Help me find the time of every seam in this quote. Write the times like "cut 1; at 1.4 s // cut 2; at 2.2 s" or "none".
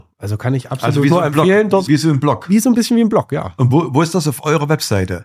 cut 1; at 1.9 s